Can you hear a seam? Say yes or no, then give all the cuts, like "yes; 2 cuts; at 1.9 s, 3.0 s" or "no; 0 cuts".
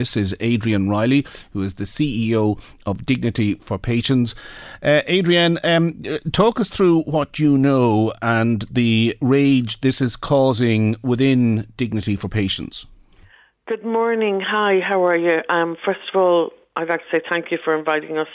no; 0 cuts